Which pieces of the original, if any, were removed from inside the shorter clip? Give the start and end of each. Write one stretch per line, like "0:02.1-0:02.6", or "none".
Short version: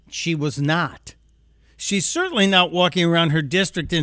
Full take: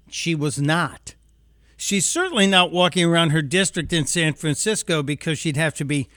none